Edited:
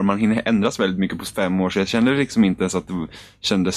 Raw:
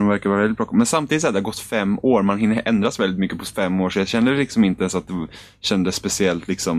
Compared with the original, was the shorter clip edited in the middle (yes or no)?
no